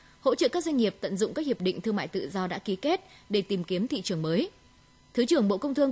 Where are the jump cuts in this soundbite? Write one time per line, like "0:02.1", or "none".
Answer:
none